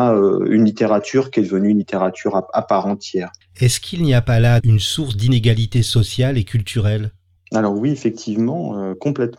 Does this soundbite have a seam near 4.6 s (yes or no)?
yes